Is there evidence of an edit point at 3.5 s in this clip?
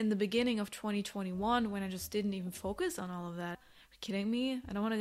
yes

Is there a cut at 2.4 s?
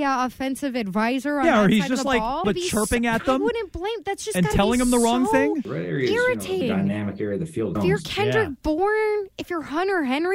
yes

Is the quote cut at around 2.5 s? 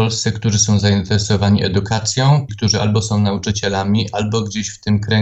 yes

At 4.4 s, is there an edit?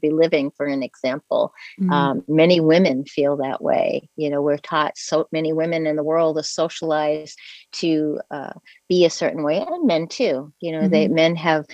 no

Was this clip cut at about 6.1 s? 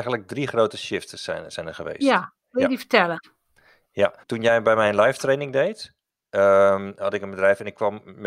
no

